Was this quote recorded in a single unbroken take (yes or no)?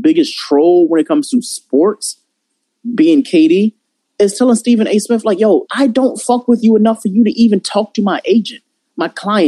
no